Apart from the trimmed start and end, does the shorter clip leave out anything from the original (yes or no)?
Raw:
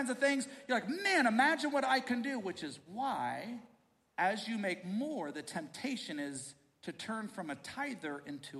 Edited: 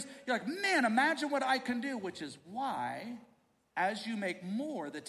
no